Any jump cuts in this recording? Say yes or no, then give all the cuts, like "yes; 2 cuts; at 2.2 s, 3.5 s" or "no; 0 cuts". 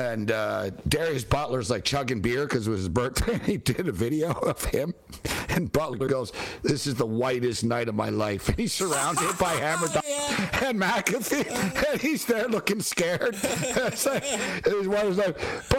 yes; 1 cut; at 13.3 s